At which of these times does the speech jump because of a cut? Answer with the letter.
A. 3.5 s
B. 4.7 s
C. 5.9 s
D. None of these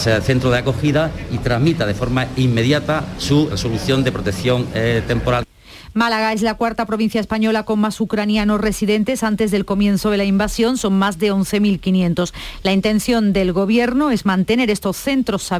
A